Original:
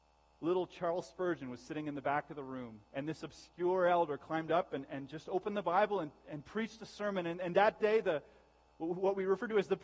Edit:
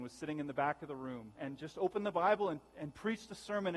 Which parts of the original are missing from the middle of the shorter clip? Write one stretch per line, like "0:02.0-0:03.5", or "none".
0:02.8-0:04.9